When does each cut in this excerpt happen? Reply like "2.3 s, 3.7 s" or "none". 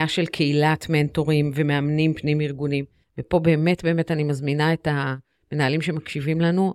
none